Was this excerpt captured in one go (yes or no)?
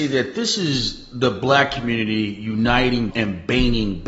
no